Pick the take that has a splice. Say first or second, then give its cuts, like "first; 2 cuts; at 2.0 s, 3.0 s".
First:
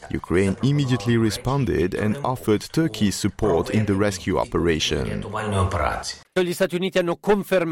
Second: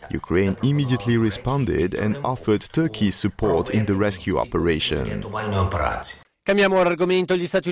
first; 1 cut; at 6.4 s